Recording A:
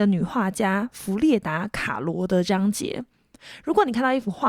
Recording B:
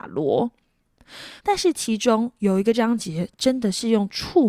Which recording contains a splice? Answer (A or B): B